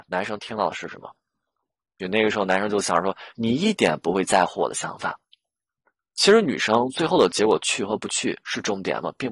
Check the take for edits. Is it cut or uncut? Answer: cut